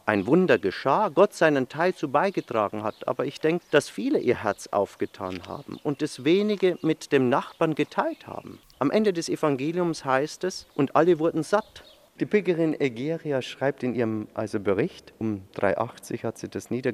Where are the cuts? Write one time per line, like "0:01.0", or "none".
0:03.6
0:08.7
0:12.1

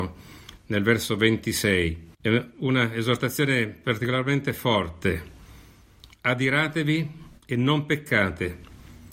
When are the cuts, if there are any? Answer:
0:02.1

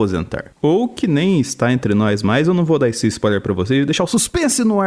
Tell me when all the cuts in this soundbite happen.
none

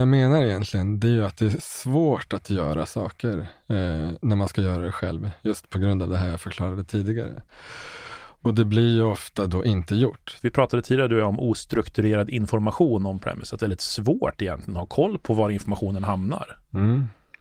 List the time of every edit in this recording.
0:10.4
0:13.6

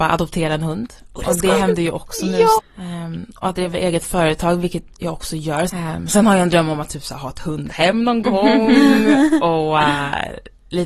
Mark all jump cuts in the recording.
0:02.6
0:05.7

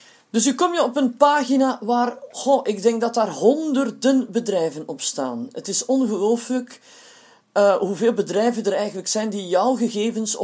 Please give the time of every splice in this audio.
none

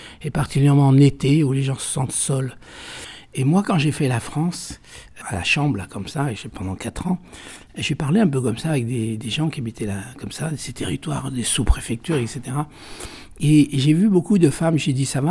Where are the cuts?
0:05.2

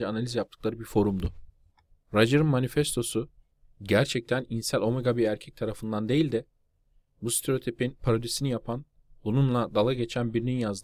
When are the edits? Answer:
none

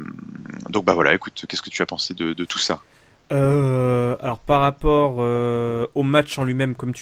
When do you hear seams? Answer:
none

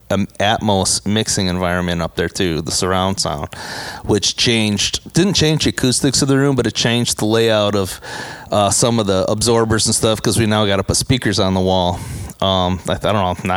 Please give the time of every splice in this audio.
none

